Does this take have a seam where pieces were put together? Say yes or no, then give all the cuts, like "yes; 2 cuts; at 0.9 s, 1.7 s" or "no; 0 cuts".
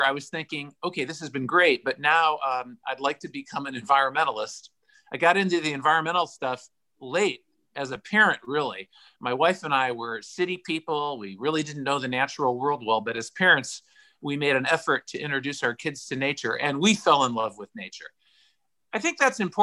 no; 0 cuts